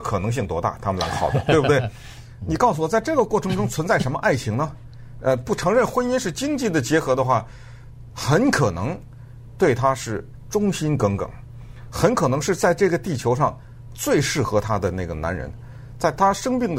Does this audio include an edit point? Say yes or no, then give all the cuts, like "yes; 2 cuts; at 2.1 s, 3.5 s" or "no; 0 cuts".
yes; 1 cut; at 8.1 s